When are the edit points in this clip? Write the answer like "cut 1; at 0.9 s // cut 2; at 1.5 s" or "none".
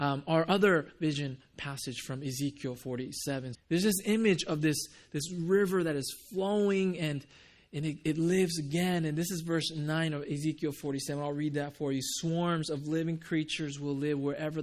cut 1; at 3.5 s